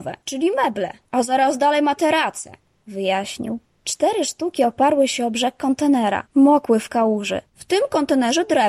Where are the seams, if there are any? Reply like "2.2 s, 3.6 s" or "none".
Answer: 6.3 s, 7.4 s